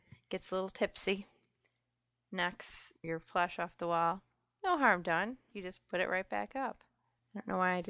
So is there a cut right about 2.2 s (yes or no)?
no